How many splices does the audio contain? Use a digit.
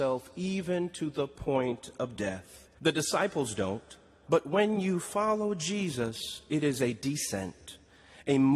2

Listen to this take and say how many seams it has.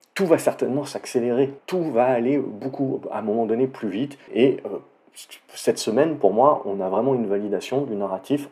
2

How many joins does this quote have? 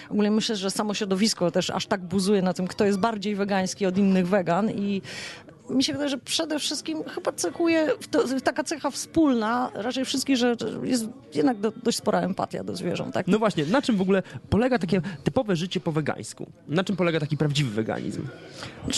1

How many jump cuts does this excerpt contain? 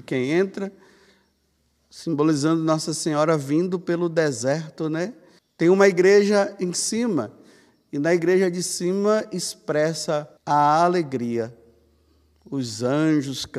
2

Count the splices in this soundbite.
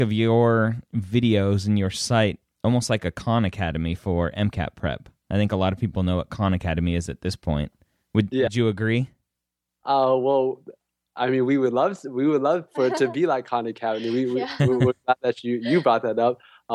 0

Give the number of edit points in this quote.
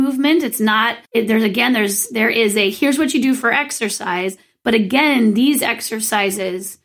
1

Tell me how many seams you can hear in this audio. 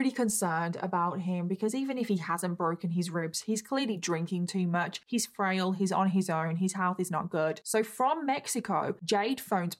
0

